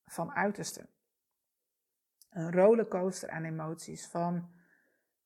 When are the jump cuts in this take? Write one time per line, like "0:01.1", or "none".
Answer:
none